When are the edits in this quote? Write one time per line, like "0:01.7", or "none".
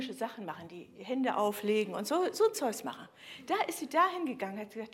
none

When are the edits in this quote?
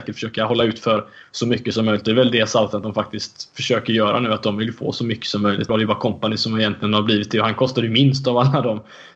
0:05.7

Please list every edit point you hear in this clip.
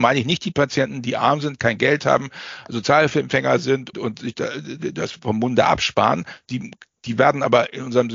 0:03.9

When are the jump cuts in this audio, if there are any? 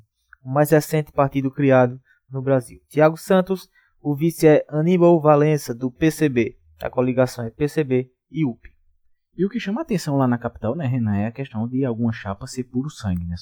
none

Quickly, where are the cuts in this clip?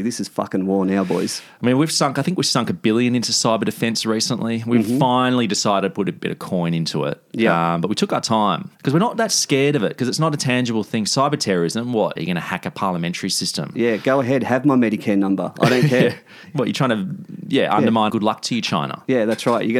0:08.7
0:12.2
0:18.1

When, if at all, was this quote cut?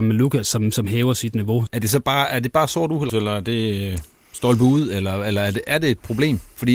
0:01.7
0:03.1

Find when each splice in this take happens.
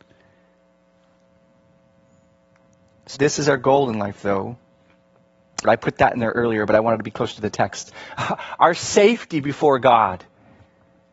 0:03.2
0:05.6

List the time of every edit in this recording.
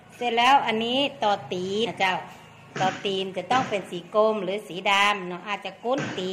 0:01.9

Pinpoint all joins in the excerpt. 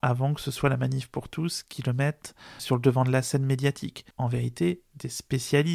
0:02.6
0:04.1

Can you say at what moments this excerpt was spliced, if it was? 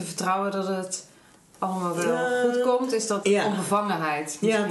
0:03.2

